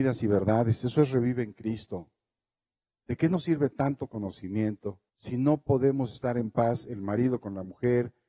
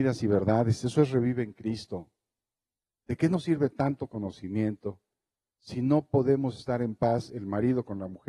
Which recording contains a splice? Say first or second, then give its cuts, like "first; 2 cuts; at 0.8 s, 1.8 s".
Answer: first; 1 cut; at 5.1 s